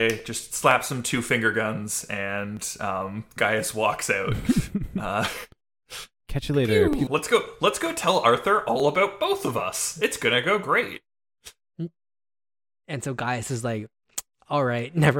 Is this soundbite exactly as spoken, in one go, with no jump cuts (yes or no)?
no